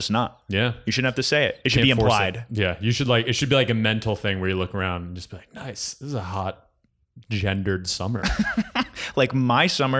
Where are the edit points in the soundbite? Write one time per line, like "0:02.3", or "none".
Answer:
none